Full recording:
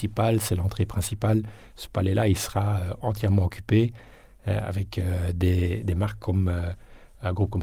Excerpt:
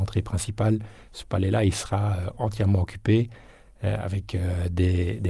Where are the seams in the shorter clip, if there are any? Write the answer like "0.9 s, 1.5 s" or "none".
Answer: none